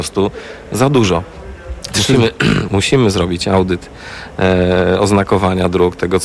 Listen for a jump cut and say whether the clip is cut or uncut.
cut